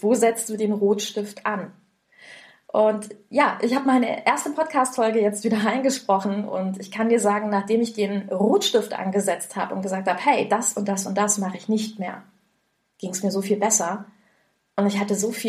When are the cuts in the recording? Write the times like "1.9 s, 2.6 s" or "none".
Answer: none